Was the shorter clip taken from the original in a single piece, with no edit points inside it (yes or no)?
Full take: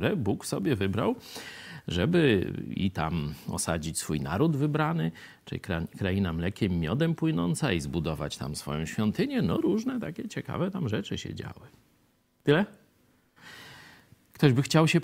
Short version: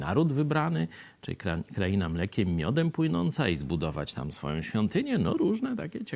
yes